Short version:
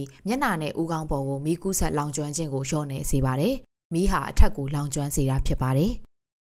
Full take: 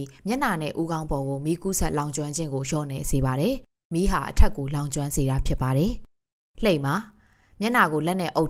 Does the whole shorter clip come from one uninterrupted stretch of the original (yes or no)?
yes